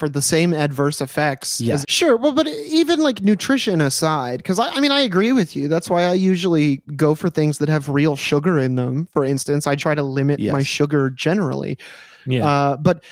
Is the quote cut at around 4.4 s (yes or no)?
no